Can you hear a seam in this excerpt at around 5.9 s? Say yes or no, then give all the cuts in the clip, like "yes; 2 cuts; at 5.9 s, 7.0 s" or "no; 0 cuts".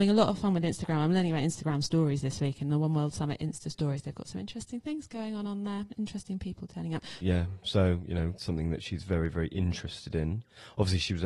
no; 2 cuts; at 7.2 s, 8.4 s